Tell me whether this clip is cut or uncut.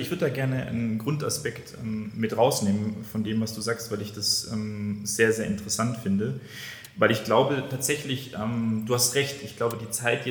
uncut